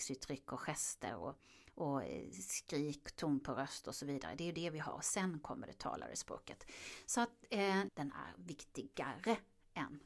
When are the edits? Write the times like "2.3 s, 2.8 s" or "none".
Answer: 7.9 s